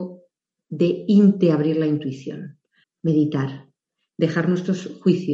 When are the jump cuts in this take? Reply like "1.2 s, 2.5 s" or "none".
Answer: 2.8 s